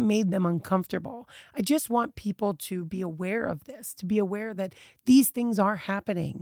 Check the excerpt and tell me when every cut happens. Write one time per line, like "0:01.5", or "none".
none